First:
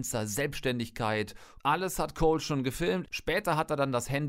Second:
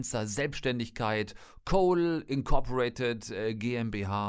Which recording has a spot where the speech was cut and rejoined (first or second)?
first